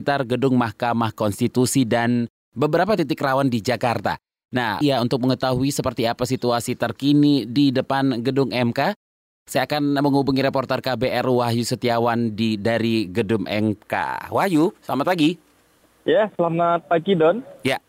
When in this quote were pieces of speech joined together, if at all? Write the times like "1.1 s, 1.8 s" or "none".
4.8 s